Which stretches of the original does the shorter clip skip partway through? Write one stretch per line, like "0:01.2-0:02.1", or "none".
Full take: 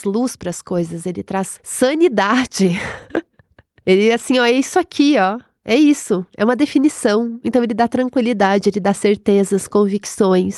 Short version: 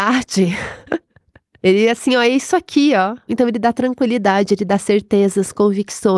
0:05.5-0:07.4